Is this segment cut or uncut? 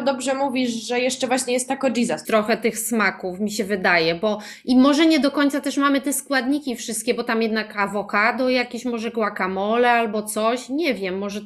cut